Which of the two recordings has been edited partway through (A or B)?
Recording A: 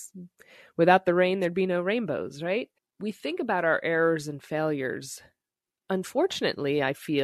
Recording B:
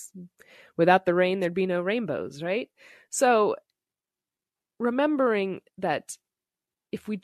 A